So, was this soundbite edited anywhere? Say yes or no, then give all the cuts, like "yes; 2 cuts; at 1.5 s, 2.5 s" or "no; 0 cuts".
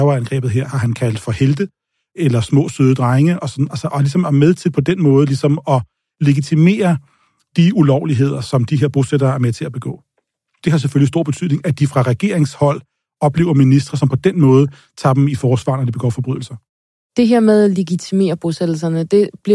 no; 0 cuts